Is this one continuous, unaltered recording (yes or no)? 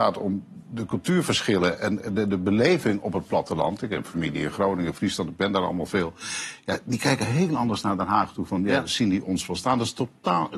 yes